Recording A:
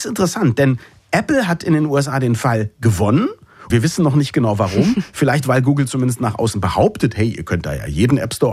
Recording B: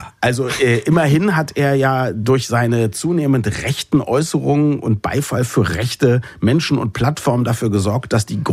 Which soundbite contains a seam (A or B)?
A